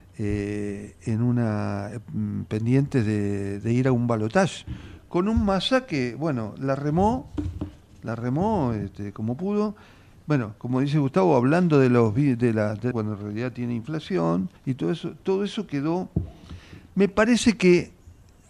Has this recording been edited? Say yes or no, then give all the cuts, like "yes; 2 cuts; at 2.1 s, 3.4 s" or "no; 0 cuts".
yes; 2 cuts; at 12.9 s, 14.6 s